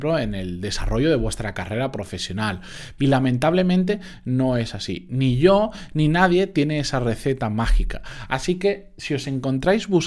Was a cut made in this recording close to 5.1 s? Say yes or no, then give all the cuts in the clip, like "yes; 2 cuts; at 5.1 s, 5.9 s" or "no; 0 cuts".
no; 1 cut; at 3.0 s